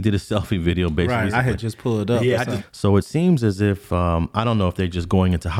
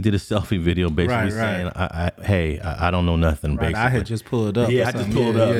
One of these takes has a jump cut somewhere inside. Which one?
first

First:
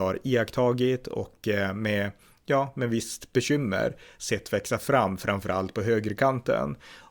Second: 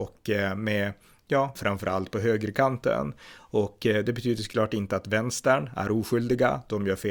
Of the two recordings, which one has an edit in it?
second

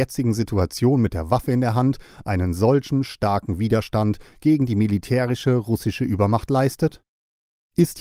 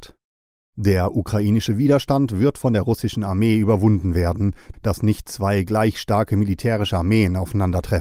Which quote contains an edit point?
second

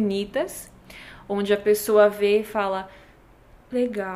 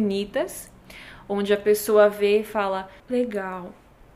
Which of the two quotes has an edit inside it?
second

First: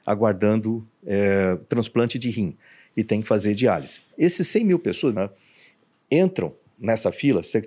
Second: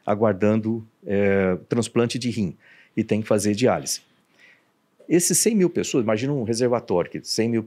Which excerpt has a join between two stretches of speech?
first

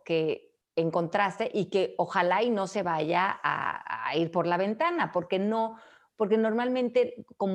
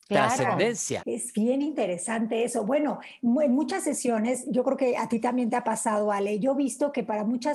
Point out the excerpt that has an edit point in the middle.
second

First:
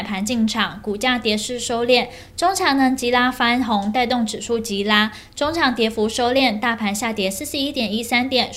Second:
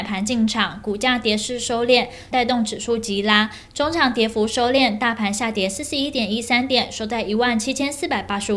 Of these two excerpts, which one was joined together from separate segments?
second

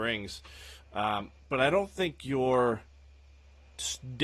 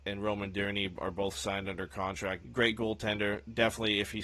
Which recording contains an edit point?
second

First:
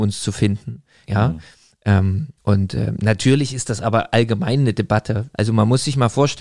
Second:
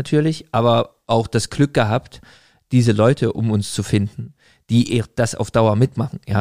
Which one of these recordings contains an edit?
first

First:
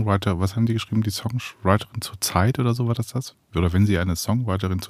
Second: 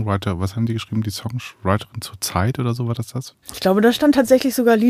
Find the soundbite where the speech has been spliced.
second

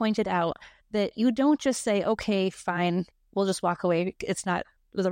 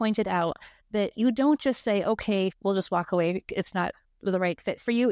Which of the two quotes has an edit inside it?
second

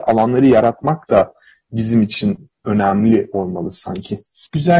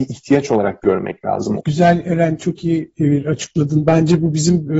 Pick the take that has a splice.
second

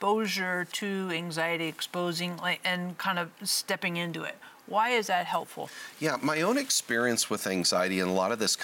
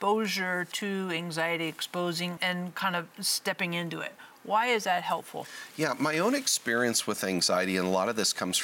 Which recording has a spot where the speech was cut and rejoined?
second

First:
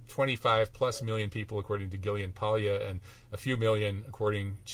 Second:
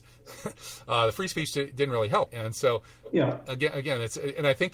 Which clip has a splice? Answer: second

